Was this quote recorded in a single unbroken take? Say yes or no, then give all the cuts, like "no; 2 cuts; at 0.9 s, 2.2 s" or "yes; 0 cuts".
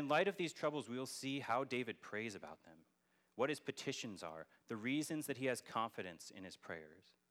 yes; 0 cuts